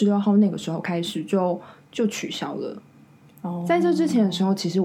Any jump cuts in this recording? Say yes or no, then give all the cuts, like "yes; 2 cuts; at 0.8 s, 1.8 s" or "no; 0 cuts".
no; 0 cuts